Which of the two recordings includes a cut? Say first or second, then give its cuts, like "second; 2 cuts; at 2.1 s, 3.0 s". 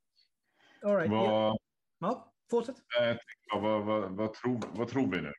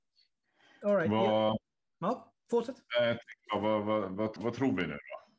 second; 1 cut; at 4.4 s